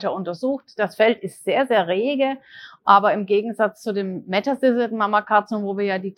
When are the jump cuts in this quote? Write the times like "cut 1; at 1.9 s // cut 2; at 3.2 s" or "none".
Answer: none